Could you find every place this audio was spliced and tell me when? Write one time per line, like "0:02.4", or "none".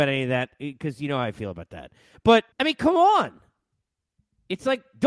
0:02.5